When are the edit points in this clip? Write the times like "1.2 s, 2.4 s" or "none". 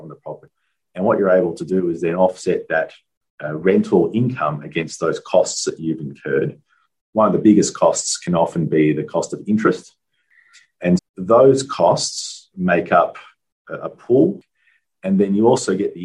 7.0 s, 11.0 s, 12.5 s